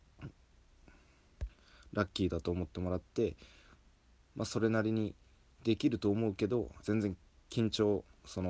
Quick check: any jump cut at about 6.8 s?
yes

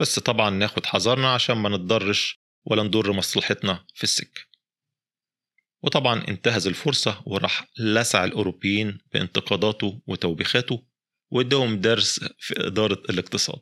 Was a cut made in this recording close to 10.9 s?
no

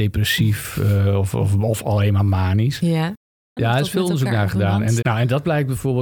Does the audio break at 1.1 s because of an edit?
no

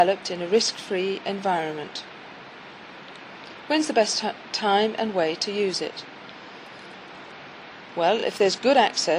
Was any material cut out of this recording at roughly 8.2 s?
no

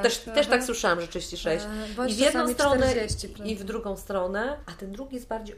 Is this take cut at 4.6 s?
yes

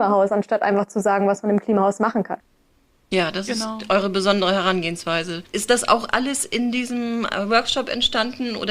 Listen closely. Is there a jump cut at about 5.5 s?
no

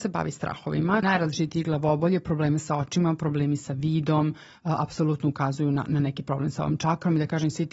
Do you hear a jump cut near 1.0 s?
yes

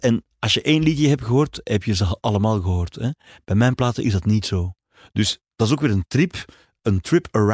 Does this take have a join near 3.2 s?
no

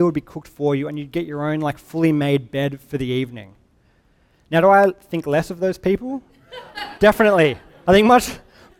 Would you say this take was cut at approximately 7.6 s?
no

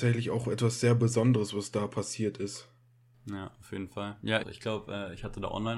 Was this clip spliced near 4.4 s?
yes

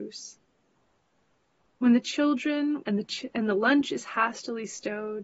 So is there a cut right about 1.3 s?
no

